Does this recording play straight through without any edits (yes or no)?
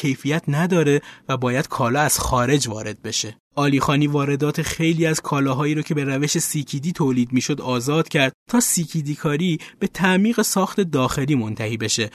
no